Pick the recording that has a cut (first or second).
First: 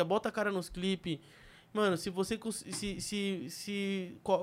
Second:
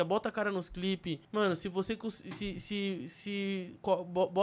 second